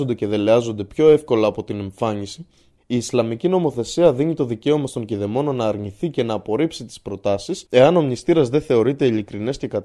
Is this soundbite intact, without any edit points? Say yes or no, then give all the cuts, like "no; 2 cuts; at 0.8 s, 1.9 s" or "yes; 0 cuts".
no; 2 cuts; at 2.8 s, 7.7 s